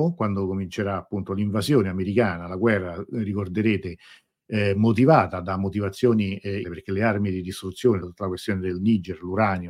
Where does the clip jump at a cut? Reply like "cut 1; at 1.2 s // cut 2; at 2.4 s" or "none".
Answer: cut 1; at 6.6 s // cut 2; at 8.0 s